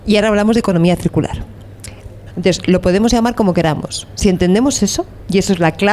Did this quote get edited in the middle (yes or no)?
yes